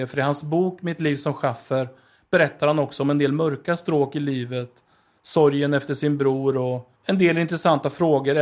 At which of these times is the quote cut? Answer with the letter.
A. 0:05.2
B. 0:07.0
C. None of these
B